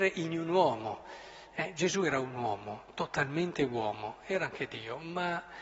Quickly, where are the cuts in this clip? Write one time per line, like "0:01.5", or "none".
none